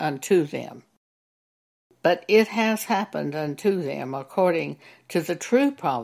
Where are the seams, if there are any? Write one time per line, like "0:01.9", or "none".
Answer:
none